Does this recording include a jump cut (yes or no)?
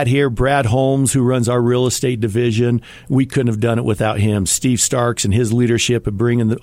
no